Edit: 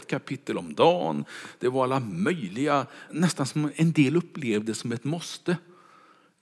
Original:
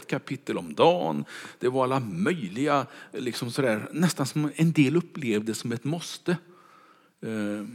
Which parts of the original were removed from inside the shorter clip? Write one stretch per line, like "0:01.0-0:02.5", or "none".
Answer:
0:03.1-0:03.9